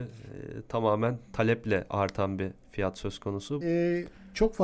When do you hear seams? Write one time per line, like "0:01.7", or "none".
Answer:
0:03.6